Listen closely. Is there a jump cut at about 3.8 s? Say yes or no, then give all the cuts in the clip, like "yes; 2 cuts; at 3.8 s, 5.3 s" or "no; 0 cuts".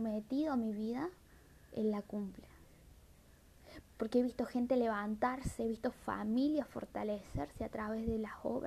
yes; 1 cut; at 3.8 s